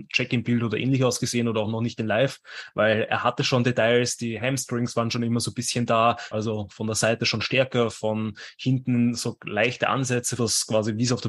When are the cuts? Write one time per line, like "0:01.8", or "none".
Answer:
0:06.3
0:10.4